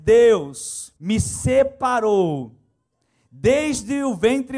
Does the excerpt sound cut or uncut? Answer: cut